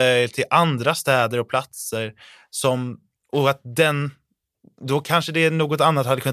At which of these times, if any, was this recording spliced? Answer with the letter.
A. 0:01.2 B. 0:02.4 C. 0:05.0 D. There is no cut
D